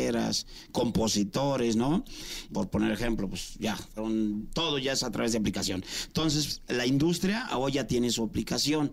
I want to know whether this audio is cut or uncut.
cut